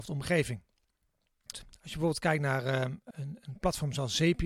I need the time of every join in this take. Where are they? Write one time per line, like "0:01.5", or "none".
0:01.5
0:03.1